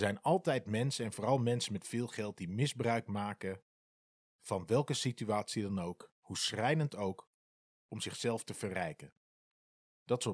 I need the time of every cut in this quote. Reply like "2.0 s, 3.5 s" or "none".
none